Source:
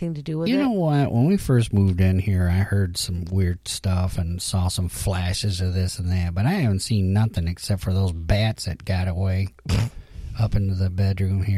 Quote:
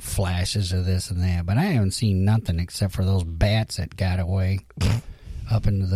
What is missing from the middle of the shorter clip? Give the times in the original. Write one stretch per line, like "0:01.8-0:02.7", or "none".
none